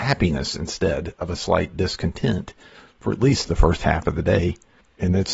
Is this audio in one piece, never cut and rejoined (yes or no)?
yes